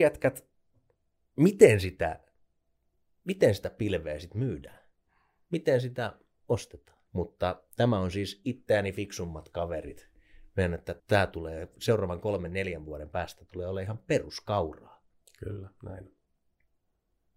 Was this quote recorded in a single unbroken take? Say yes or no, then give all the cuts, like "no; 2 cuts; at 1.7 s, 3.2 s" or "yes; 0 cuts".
no; 3 cuts; at 7.1 s, 11.0 s, 15.2 s